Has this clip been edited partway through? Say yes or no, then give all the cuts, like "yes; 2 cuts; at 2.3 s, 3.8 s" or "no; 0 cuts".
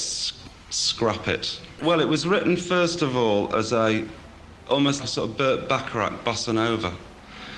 yes; 2 cuts; at 1.8 s, 5.0 s